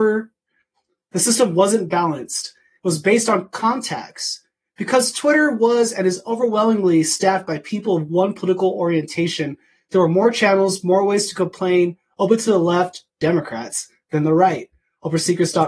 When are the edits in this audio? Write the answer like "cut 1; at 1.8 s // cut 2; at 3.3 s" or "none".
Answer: cut 1; at 13.1 s